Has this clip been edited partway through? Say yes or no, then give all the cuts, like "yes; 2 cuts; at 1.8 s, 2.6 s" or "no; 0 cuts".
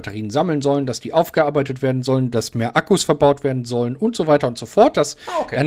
no; 0 cuts